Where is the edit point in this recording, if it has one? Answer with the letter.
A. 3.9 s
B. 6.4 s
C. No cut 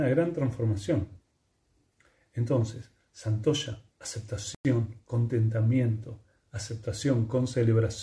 A